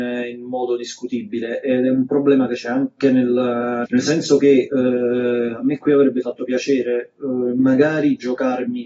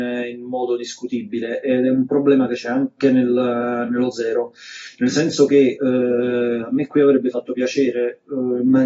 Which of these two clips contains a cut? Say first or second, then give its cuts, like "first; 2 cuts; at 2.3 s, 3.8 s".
first; 1 cut; at 3.8 s